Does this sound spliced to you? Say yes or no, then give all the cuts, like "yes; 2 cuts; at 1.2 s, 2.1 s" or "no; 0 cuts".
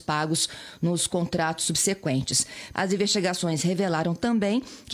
yes; 1 cut; at 2.7 s